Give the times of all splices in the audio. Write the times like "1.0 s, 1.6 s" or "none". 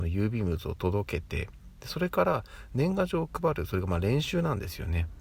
none